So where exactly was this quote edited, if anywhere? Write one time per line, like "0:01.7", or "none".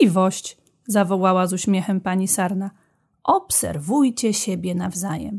none